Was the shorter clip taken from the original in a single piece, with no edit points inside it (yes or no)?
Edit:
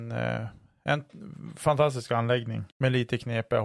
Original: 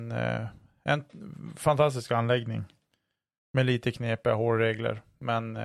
no